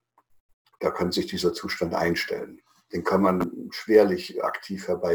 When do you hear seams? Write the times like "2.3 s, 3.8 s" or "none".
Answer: none